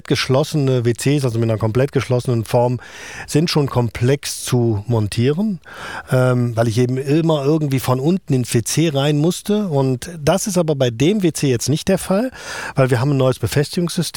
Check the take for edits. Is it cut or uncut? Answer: uncut